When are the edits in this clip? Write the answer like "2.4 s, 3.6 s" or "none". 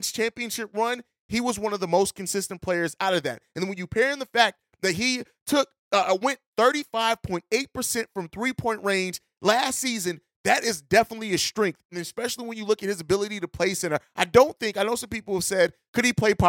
none